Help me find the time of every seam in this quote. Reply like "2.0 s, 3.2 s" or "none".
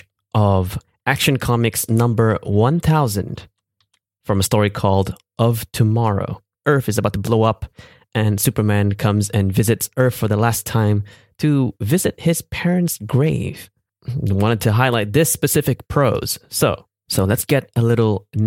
6.5 s

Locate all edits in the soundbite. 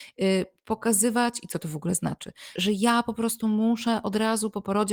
2.6 s

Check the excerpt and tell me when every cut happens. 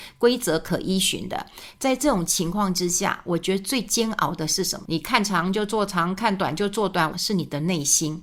1.8 s, 4.8 s, 7.1 s

